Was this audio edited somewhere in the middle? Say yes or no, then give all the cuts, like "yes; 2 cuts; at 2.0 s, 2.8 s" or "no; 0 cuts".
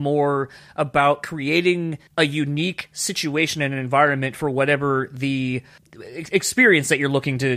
yes; 1 cut; at 2.1 s